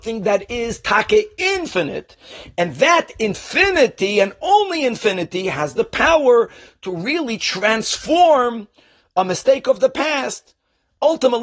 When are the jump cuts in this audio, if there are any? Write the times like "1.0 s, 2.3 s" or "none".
none